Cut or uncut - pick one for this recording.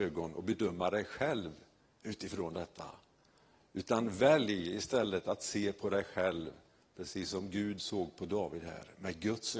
uncut